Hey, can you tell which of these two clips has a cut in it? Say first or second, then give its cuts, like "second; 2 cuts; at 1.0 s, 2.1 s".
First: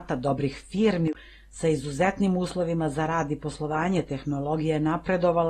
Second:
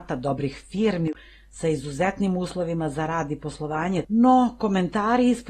second; 1 cut; at 4.0 s